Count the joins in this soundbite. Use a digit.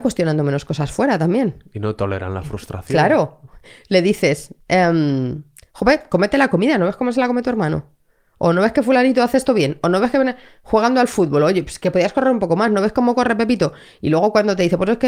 0